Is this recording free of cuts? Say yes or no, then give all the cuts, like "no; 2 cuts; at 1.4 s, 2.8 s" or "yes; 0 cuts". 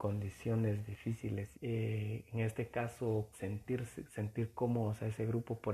no; 2 cuts; at 1.5 s, 3.3 s